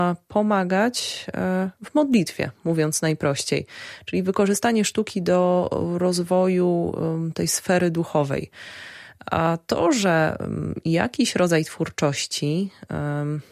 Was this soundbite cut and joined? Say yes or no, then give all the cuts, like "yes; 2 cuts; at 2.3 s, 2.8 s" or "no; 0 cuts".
no; 0 cuts